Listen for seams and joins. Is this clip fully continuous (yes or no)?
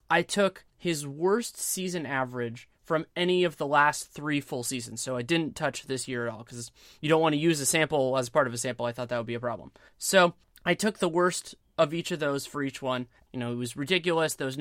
no